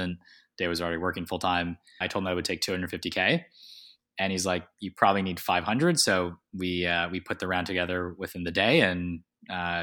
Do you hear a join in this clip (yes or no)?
yes